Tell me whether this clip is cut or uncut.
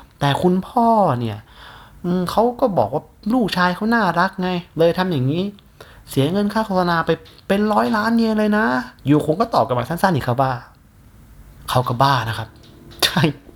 cut